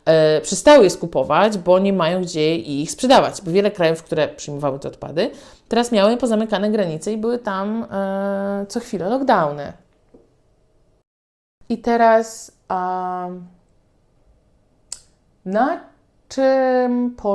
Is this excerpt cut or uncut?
uncut